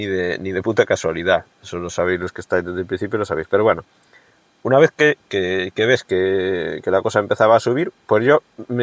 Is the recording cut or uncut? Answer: uncut